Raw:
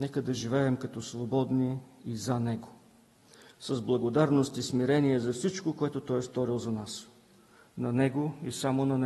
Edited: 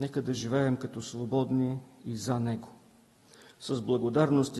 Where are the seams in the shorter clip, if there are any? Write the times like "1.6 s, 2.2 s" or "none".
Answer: none

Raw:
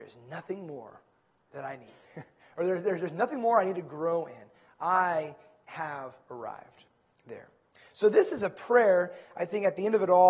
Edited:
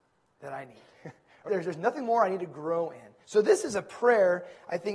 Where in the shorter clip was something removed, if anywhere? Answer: 1.5 s, 3.2 s

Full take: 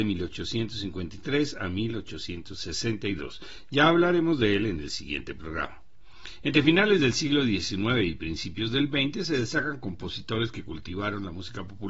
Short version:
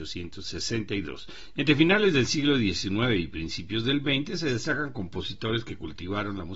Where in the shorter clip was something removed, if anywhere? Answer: 1.6 s

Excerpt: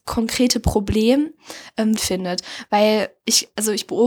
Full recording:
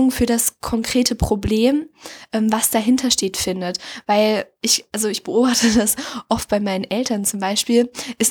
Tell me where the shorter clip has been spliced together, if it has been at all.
2.0 s

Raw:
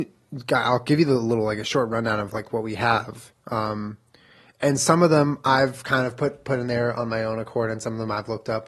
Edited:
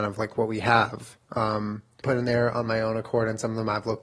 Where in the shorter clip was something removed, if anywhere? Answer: 2.0 s

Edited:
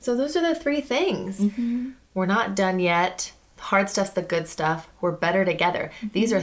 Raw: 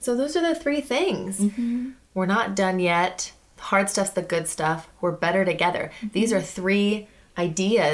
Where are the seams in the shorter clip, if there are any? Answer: none

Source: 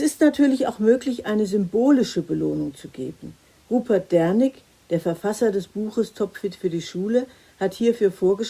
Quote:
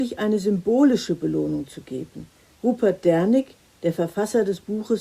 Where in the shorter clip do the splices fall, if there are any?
none

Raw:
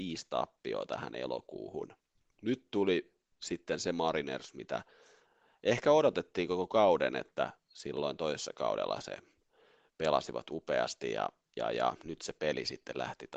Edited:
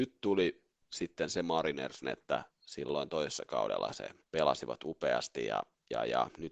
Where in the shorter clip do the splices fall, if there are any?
2.0 s, 4.2 s

